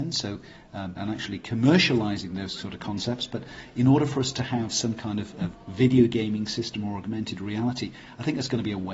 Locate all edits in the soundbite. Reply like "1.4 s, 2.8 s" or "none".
1.0 s